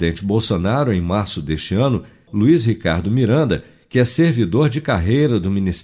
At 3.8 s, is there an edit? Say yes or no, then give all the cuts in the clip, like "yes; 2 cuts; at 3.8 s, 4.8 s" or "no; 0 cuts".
no; 1 cut; at 2.3 s